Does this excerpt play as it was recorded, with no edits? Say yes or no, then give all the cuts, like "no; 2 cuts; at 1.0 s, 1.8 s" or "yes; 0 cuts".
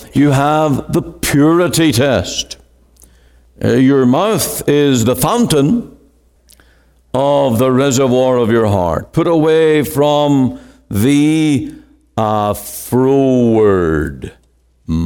yes; 0 cuts